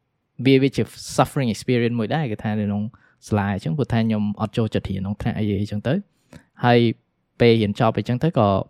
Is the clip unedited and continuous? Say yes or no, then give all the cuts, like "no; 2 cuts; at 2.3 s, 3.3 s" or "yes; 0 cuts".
yes; 0 cuts